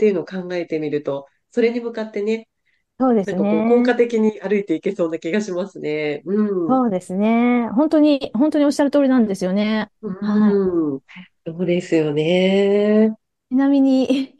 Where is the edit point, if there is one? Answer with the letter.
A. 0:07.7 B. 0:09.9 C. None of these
B